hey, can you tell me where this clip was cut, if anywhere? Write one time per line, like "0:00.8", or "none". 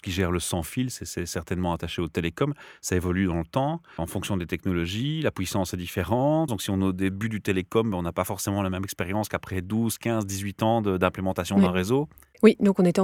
0:06.5

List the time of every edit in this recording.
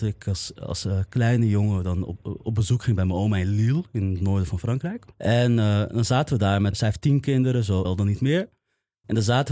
0:05.1
0:06.7
0:07.8

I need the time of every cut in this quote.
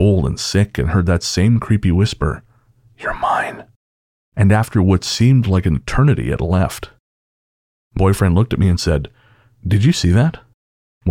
0:08.0

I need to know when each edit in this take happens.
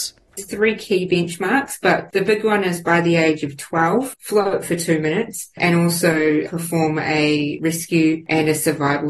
0:04.1

